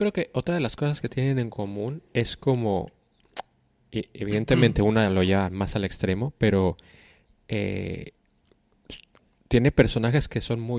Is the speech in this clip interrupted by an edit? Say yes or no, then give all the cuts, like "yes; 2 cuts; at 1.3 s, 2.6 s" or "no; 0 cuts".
no; 0 cuts